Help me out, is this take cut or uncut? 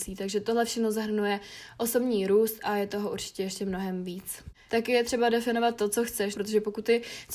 cut